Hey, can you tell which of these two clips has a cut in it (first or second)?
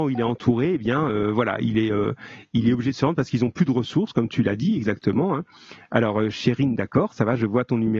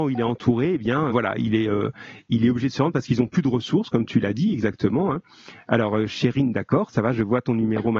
second